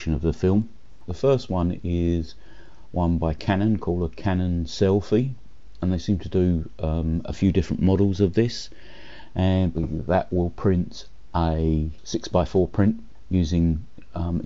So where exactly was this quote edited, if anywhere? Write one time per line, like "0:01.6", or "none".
0:01.1
0:09.7